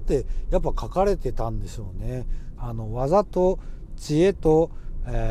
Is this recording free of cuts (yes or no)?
no